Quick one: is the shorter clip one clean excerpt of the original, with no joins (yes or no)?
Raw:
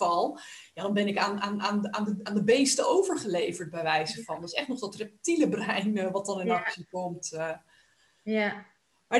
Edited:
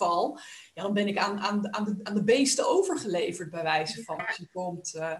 no